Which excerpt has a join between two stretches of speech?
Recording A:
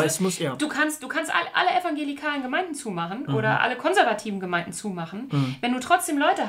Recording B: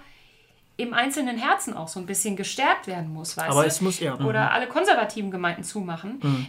B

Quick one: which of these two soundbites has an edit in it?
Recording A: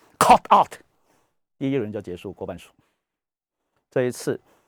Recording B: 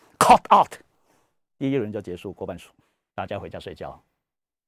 B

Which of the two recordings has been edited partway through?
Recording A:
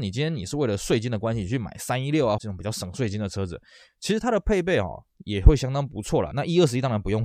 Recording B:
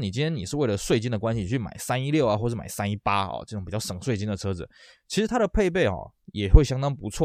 A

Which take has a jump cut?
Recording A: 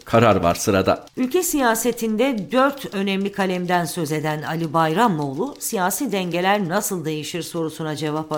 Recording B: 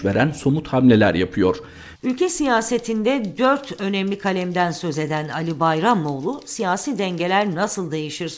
B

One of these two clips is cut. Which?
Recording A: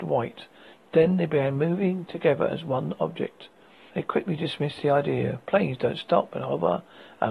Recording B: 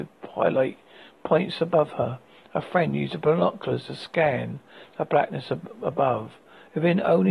A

